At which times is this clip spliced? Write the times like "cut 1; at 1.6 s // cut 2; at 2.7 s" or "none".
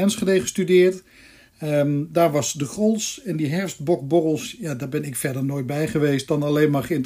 none